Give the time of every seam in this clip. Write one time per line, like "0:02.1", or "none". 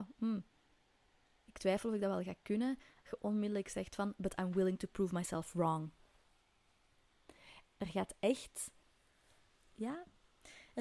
0:07.6